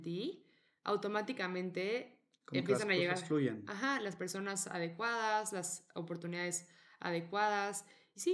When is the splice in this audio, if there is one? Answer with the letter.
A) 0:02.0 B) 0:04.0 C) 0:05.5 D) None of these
D